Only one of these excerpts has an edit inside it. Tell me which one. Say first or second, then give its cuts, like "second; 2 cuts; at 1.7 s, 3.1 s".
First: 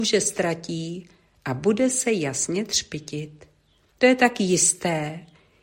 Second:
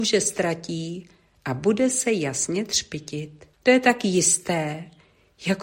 second; 1 cut; at 3.5 s